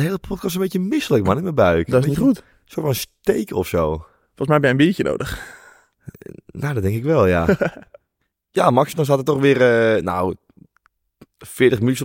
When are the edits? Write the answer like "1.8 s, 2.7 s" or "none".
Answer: none